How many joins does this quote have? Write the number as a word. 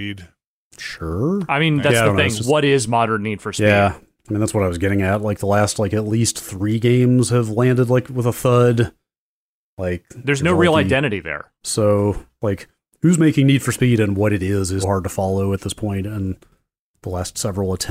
two